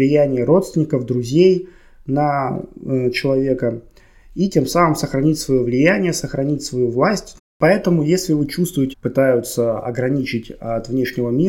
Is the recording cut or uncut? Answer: cut